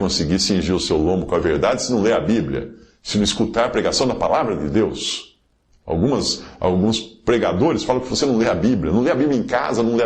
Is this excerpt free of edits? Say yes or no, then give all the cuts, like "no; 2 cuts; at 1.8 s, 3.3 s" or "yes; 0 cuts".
yes; 0 cuts